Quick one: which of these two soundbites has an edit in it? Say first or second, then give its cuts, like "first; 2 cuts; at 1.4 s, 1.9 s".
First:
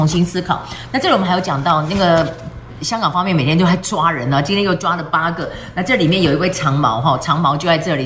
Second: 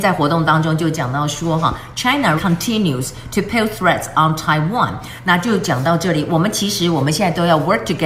second; 1 cut; at 2.4 s